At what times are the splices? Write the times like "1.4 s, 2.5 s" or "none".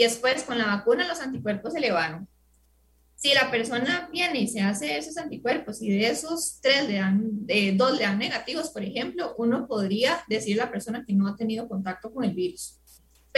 none